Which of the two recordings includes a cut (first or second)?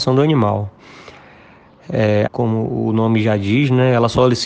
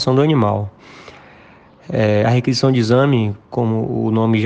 first